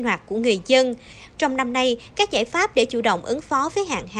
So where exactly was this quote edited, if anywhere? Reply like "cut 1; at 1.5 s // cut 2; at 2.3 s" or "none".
cut 1; at 1.3 s